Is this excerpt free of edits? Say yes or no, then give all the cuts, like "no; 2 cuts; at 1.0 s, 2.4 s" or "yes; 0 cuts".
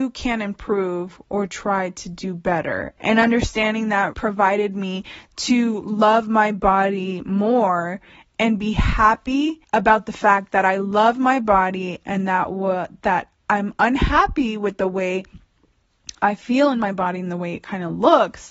no; 3 cuts; at 3.0 s, 4.1 s, 9.6 s